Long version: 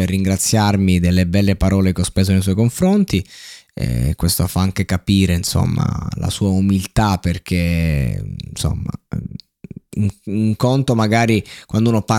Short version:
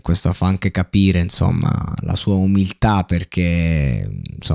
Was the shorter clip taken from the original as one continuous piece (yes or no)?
yes